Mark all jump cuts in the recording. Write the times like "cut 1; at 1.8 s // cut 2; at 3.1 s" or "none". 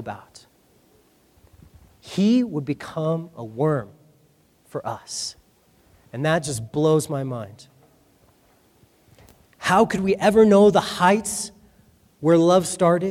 none